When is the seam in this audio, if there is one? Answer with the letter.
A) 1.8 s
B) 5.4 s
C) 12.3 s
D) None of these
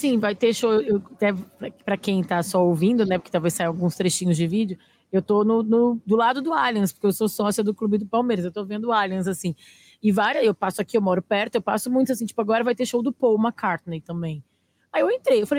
D